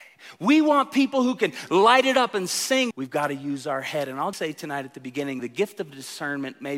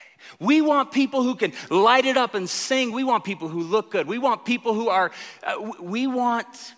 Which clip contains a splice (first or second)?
first